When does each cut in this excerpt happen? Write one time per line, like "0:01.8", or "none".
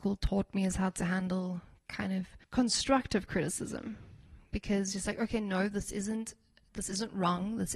0:02.4